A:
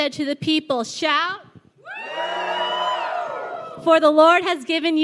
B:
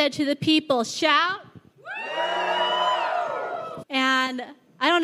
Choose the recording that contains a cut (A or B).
B